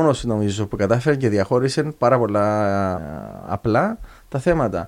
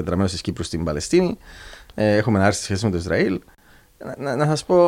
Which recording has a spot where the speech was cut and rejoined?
first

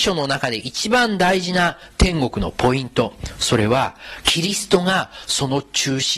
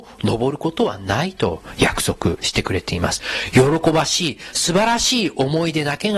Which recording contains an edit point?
first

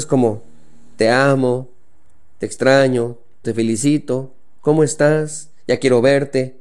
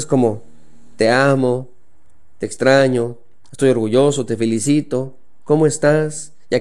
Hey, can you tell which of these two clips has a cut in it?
first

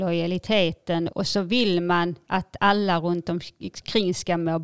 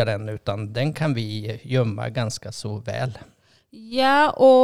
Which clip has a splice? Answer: first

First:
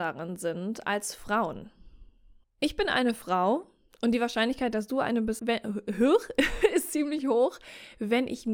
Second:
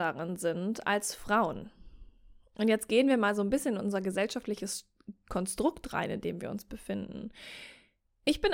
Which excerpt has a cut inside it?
first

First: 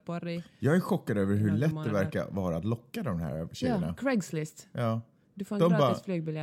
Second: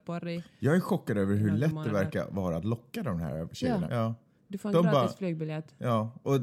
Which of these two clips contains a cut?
second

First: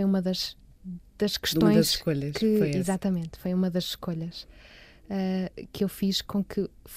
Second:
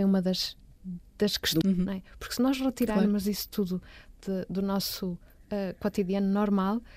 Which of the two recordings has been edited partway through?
second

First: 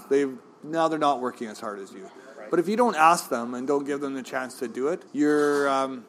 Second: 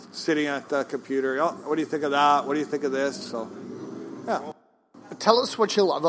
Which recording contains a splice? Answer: first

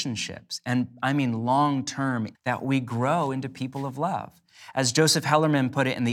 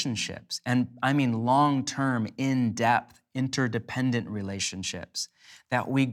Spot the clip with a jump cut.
first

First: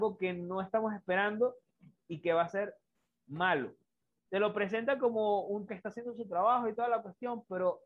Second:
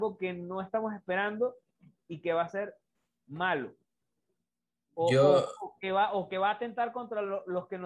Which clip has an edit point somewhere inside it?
first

